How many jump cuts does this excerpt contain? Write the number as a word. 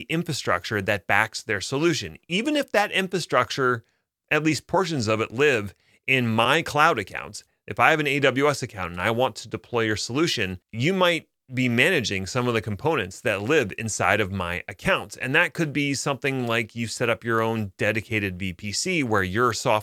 one